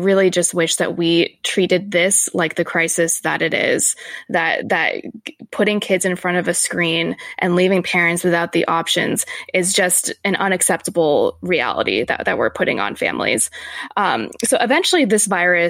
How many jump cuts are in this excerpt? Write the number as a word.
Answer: zero